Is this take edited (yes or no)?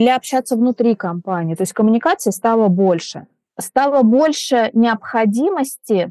no